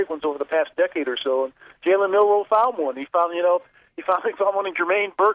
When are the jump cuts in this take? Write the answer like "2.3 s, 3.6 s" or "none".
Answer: none